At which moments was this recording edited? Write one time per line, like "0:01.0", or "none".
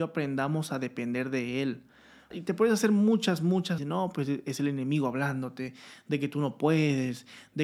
0:02.3
0:03.8